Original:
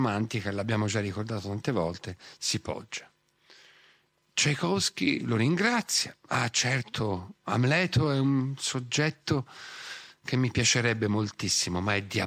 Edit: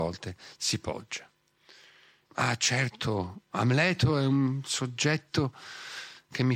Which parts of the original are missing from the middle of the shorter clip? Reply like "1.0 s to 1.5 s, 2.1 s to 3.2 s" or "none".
4.1 s to 6.2 s

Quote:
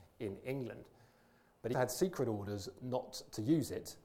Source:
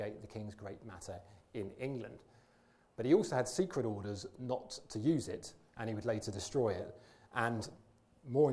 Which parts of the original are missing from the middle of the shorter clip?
3.1 s to 3.3 s

